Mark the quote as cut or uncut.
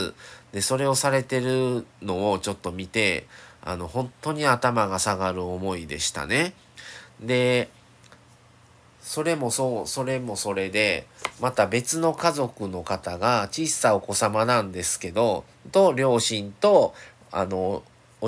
uncut